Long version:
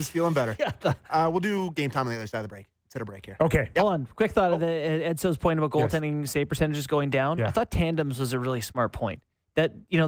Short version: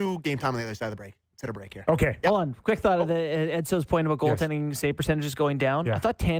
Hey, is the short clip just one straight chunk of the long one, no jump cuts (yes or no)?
yes